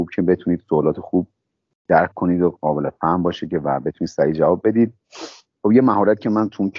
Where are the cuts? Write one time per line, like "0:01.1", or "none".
none